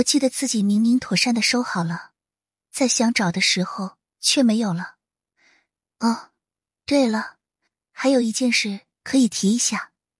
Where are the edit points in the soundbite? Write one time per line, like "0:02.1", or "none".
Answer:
0:05.9